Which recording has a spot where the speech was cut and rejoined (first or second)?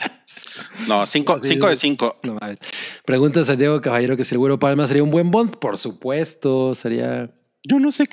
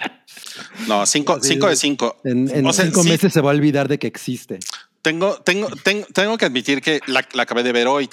first